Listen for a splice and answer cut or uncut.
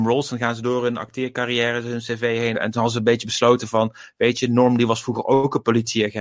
cut